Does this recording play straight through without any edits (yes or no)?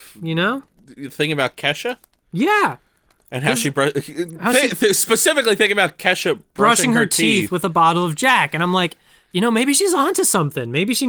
yes